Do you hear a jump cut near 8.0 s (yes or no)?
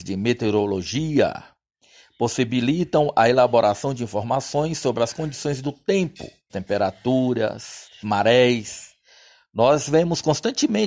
yes